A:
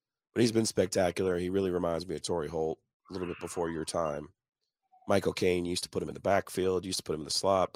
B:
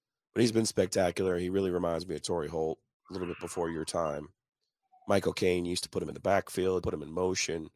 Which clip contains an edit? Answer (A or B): B